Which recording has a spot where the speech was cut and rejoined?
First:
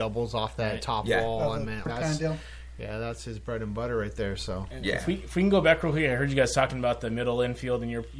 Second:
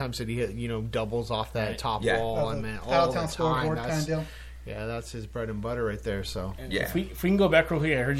first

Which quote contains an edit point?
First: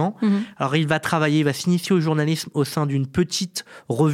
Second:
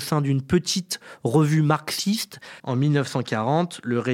second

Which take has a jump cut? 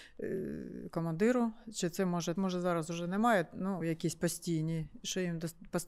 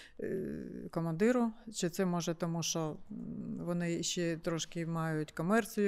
first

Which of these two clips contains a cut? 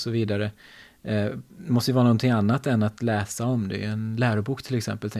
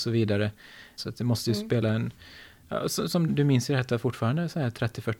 second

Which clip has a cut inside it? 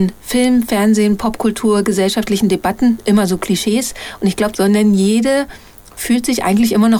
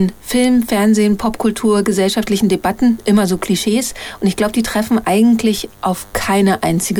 first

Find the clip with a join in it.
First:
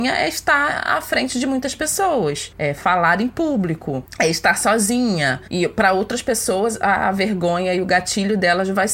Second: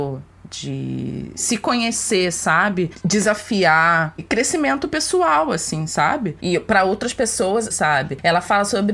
second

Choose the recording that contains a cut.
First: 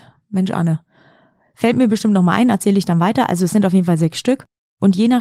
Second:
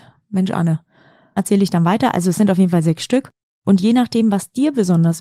second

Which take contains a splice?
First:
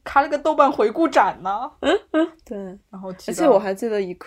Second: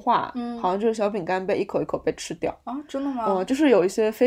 first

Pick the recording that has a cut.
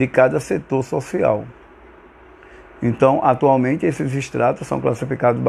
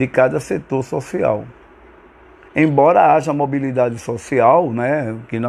second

